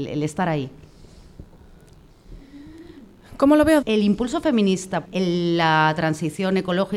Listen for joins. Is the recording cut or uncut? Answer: cut